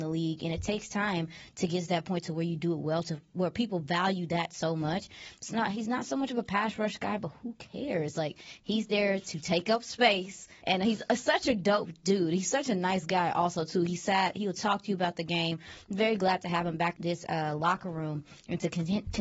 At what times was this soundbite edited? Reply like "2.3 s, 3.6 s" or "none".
10.6 s, 17.0 s